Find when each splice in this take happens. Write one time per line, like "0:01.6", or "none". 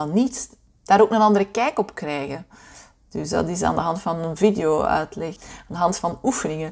0:05.4

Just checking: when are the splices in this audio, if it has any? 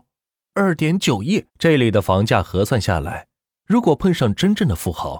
0:01.5

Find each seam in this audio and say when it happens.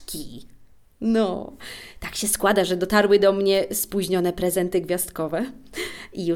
none

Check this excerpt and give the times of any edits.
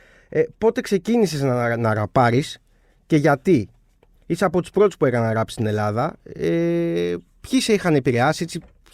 none

